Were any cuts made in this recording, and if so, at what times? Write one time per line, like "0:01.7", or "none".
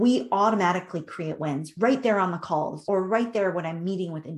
0:02.9